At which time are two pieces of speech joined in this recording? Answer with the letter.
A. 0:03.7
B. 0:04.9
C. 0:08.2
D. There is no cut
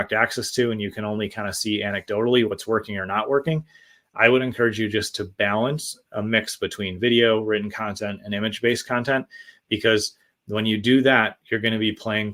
D